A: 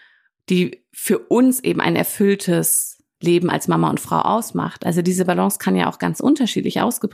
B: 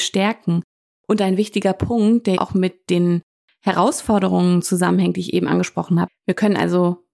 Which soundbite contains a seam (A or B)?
B